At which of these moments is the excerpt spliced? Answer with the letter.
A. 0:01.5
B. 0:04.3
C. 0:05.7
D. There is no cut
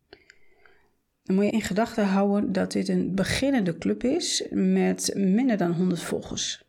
A